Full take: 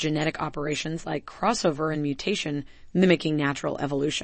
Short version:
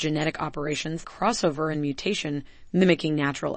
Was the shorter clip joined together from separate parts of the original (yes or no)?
yes